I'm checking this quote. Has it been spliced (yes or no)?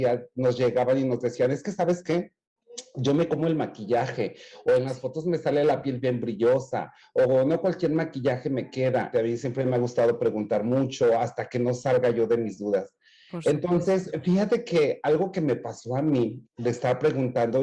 yes